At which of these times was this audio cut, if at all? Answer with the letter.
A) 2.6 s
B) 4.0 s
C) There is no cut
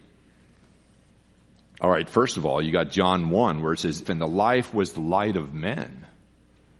B